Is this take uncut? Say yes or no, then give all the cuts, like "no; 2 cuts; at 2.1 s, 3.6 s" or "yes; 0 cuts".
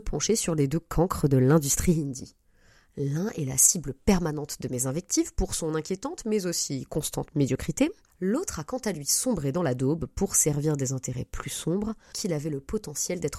no; 1 cut; at 12.1 s